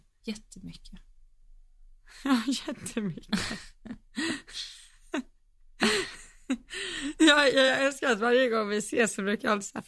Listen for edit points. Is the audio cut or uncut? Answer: uncut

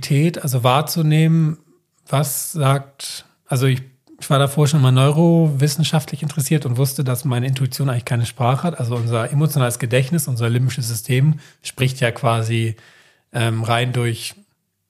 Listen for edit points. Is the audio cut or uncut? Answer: uncut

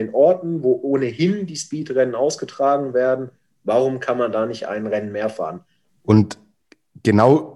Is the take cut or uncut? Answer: cut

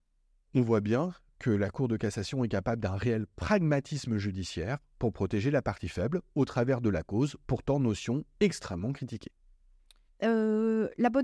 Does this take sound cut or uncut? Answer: cut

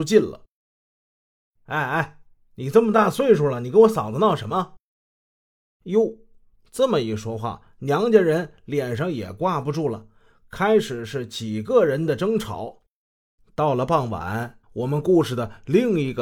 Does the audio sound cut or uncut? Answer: cut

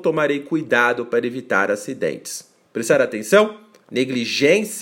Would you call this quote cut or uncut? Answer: cut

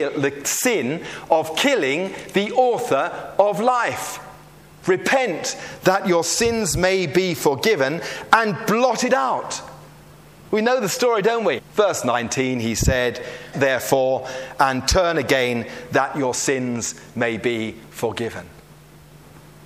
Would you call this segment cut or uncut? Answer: cut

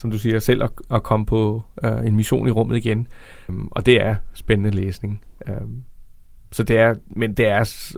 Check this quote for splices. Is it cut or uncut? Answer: cut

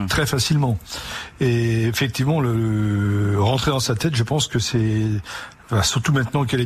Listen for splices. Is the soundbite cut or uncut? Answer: uncut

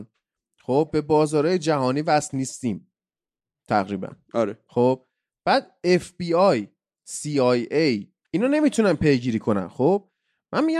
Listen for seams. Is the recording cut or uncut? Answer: uncut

